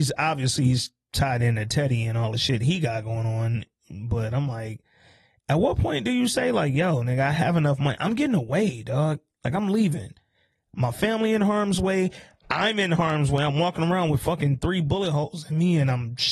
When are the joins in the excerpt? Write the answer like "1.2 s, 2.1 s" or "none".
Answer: none